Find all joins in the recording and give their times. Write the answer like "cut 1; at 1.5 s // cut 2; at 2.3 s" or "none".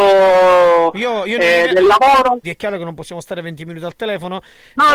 cut 1; at 2.4 s